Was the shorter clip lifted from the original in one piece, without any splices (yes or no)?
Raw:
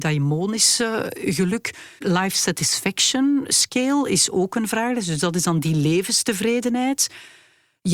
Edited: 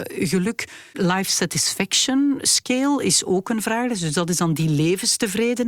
yes